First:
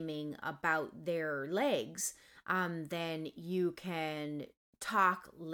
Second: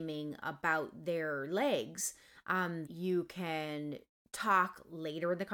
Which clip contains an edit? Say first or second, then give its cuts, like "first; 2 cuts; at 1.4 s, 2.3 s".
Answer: second; 1 cut; at 2.9 s